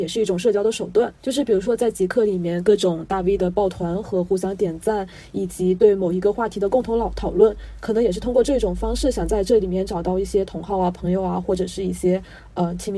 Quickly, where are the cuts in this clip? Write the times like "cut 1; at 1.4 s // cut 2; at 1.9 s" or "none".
cut 1; at 1.2 s